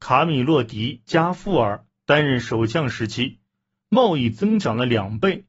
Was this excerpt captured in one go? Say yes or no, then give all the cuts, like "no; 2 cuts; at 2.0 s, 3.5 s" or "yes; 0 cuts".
no; 1 cut; at 3.8 s